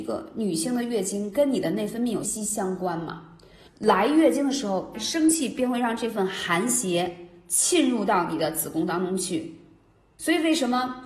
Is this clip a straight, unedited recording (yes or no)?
no